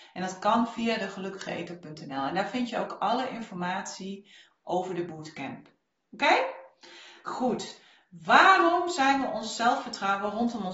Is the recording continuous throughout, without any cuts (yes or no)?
yes